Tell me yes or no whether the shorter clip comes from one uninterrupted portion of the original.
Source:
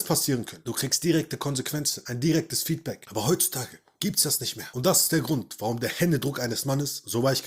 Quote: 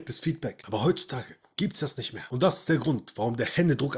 yes